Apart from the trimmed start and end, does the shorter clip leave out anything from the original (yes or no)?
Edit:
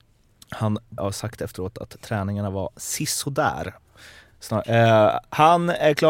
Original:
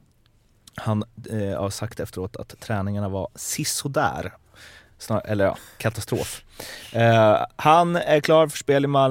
yes